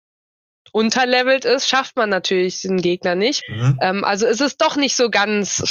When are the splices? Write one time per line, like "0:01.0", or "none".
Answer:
0:03.4